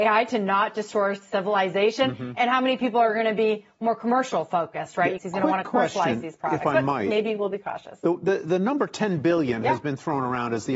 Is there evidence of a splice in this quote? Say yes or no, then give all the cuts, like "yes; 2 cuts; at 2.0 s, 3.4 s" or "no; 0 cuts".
yes; 1 cut; at 5.2 s